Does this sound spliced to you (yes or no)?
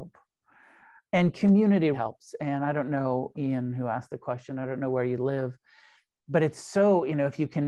yes